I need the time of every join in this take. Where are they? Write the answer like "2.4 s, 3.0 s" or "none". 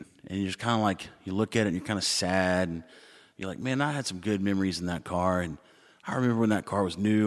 none